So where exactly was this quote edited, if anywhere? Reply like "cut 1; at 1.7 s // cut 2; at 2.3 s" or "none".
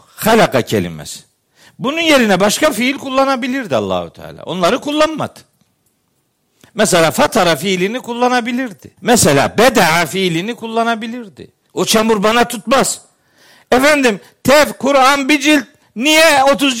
cut 1; at 9.0 s // cut 2; at 11.7 s